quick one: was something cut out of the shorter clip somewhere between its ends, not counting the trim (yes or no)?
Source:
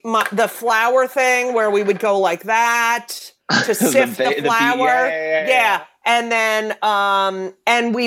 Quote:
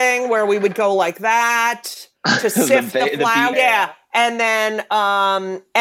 yes